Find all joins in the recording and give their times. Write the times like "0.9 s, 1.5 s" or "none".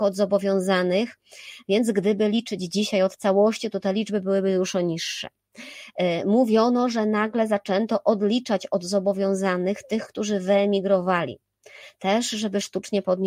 none